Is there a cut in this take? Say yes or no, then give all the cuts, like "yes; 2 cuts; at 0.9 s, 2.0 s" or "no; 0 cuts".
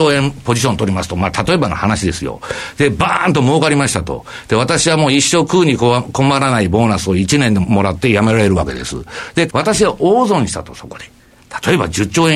yes; 2 cuts; at 7.6 s, 9.5 s